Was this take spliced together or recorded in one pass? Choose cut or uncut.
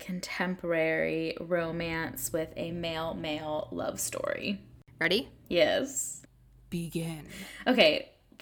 uncut